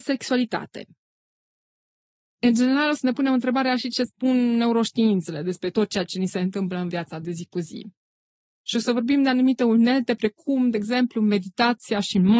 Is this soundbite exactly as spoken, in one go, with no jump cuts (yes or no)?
yes